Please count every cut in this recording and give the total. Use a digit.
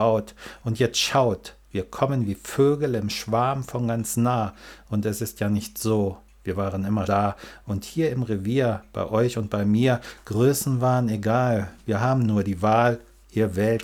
1